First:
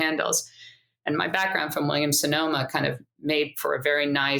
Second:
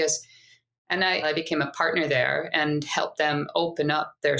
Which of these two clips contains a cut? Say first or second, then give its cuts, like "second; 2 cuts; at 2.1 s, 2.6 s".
second; 1 cut; at 1.2 s